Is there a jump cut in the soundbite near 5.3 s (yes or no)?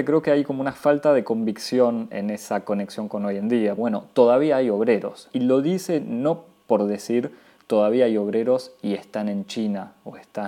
yes